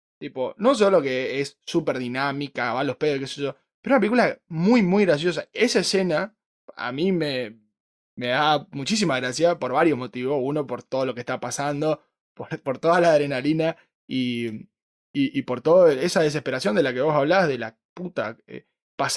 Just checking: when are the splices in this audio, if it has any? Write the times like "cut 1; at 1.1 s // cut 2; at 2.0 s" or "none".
none